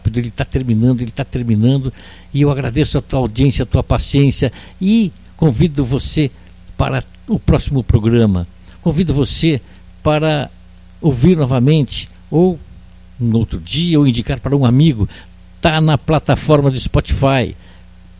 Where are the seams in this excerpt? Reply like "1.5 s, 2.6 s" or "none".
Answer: none